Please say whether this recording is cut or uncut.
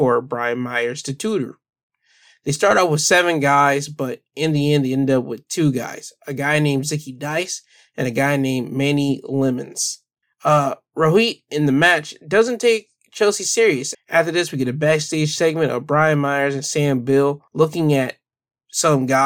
cut